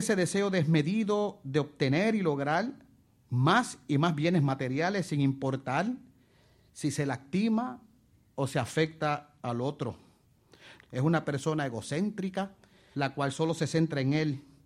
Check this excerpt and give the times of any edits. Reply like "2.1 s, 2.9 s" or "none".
10.8 s, 12.9 s